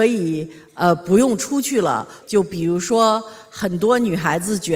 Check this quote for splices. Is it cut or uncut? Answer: cut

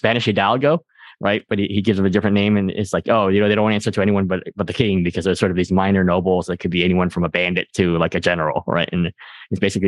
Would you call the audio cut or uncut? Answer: uncut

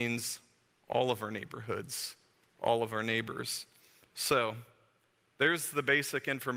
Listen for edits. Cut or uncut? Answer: uncut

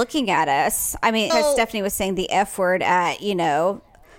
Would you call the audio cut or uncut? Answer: cut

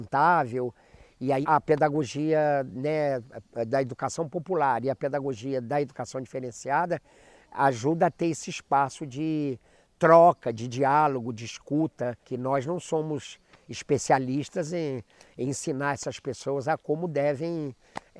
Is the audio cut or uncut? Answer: cut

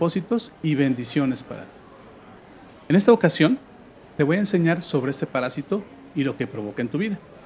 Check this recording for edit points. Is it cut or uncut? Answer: uncut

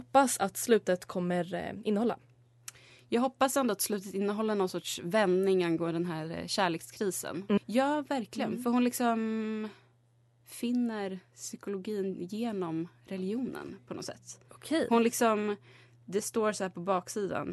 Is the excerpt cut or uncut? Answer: cut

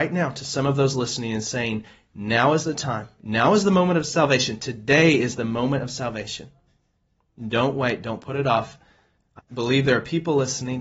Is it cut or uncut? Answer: cut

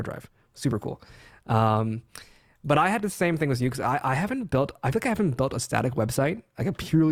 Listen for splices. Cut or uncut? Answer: uncut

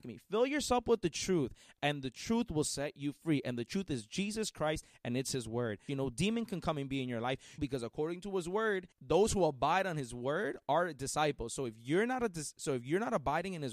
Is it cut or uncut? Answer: cut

